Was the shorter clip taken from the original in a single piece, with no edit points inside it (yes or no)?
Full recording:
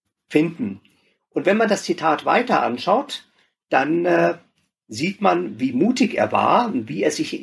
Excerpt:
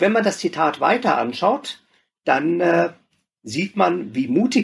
yes